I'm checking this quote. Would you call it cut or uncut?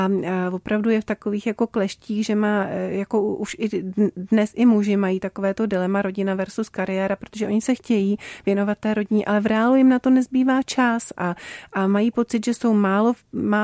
uncut